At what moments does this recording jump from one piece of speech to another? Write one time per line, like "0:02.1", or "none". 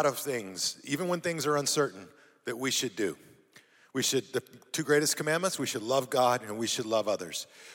none